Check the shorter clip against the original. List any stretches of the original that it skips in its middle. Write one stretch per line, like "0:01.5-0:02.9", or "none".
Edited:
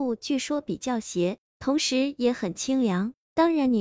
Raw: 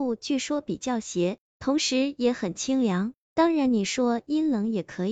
none